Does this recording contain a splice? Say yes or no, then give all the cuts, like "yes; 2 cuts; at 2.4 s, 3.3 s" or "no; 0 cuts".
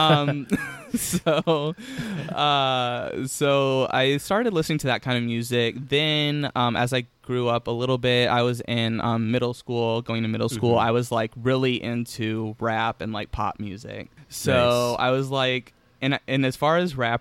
no; 0 cuts